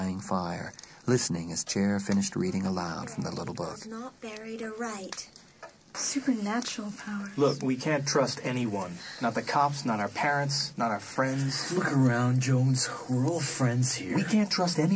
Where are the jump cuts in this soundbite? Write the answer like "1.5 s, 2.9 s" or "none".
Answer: 5.9 s